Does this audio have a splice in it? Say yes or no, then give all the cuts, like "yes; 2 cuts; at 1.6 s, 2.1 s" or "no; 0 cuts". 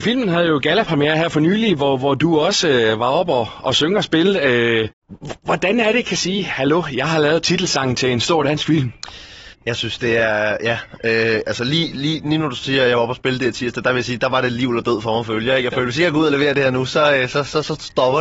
no; 0 cuts